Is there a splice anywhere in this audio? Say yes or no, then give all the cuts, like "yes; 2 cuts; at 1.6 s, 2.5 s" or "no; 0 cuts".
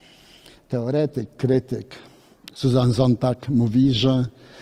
no; 0 cuts